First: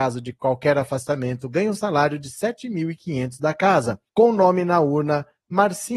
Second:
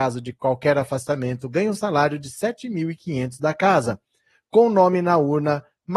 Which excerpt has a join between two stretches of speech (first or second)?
first